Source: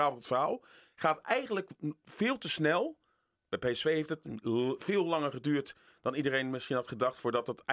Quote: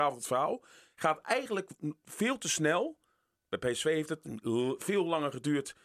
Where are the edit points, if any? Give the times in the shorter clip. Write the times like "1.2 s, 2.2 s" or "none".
none

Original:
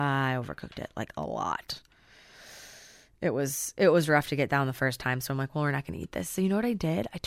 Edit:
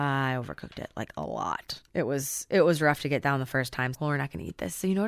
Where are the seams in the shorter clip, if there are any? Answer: 1.9 s, 3.9 s

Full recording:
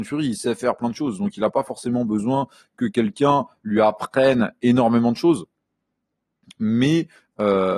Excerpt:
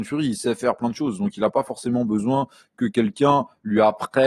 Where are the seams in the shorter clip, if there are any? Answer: none

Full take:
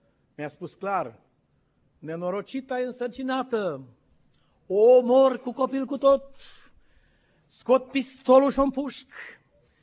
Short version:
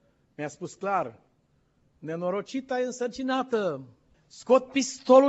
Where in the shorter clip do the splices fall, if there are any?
4.1 s

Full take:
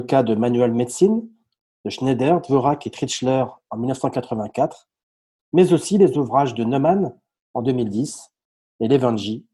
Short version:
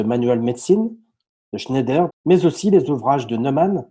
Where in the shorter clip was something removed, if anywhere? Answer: 2.1 s

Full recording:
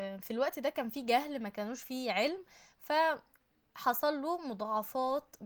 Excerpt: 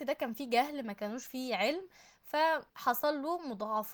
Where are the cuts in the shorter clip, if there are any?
2.7 s

